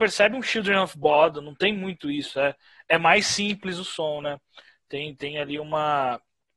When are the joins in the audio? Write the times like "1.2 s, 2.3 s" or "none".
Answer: none